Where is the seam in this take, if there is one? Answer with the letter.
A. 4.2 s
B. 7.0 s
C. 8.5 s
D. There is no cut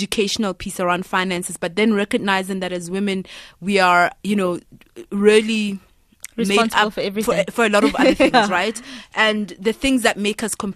D